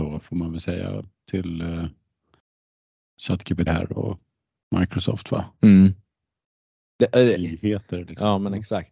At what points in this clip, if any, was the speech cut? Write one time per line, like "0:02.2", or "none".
0:03.7
0:07.3

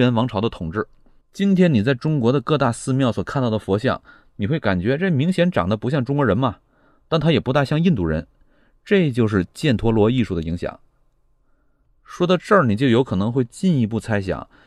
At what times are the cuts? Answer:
0:01.2

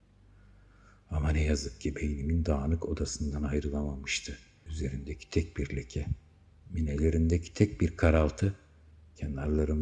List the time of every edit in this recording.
0:04.7

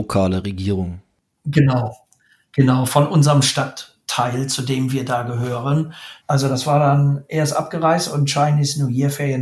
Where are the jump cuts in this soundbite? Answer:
0:06.2

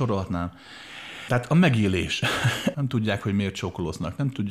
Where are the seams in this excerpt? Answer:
0:01.3
0:02.7

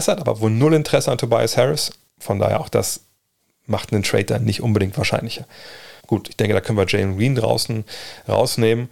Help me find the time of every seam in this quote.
0:02.1
0:06.0

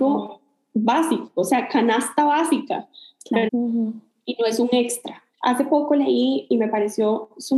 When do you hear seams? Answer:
0:03.5
0:05.3

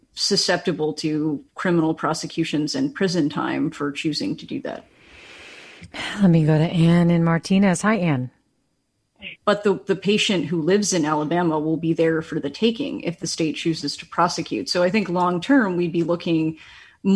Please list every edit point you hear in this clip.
0:09.4

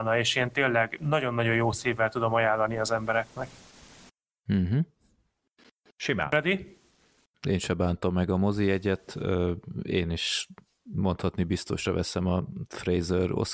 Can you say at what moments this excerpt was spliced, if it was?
0:07.3

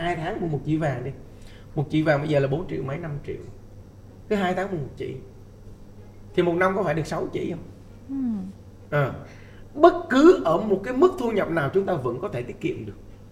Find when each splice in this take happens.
0:08.9

